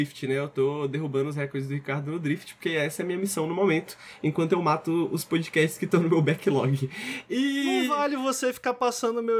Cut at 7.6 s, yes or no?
no